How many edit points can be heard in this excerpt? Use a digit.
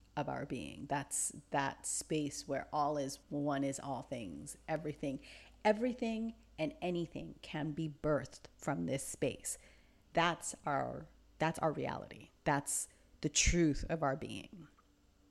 1